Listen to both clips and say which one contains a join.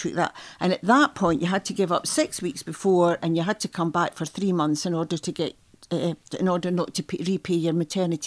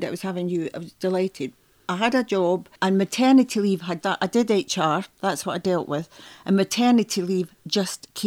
second; 2 cuts; at 2.8 s, 4.0 s

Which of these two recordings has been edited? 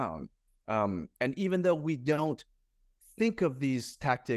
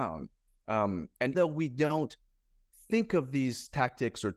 second; 1 cut; at 1.3 s

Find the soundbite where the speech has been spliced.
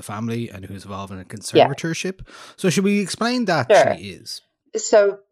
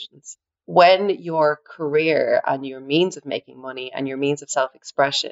first; 1 cut; at 3.7 s

